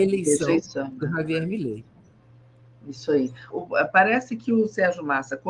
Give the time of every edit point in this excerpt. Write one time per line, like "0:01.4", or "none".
0:03.5